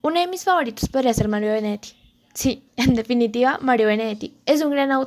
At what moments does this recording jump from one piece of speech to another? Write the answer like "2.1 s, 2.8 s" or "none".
none